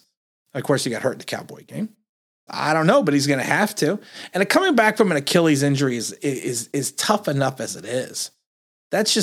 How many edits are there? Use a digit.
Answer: 1